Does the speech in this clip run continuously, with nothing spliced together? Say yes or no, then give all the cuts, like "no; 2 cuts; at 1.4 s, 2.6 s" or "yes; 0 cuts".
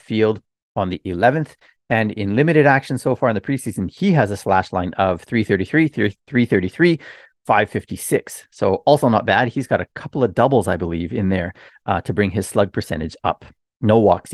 yes; 0 cuts